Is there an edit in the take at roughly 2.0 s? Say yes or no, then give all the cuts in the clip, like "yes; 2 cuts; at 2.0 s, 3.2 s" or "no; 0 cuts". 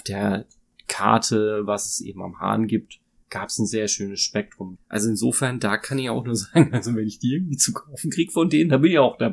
no; 1 cut; at 4.8 s